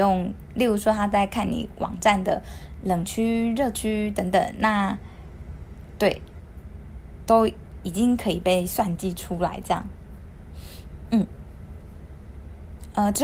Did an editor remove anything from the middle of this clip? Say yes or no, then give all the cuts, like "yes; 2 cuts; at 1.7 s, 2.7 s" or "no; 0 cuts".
no; 0 cuts